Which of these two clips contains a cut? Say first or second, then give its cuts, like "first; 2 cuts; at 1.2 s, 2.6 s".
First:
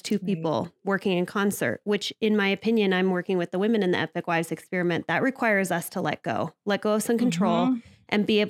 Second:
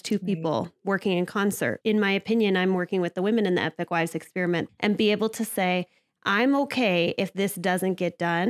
second; 2 cuts; at 1.8 s, 4.7 s